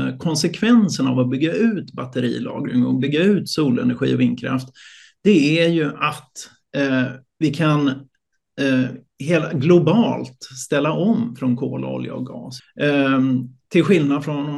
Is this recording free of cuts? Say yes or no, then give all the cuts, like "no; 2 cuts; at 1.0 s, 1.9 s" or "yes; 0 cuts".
no; 1 cut; at 12.6 s